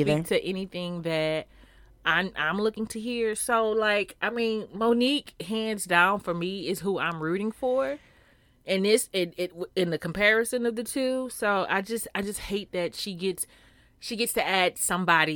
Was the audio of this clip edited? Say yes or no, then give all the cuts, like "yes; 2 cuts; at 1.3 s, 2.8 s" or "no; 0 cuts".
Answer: no; 0 cuts